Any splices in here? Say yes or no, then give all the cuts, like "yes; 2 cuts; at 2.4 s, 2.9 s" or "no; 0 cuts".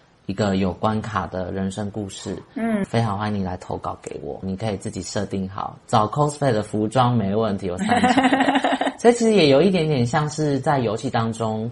yes; 1 cut; at 4.4 s